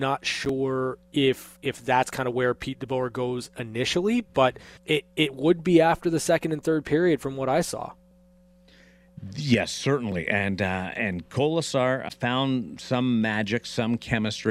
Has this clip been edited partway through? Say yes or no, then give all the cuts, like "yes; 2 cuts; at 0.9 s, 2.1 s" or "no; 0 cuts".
yes; 2 cuts; at 4.8 s, 12.1 s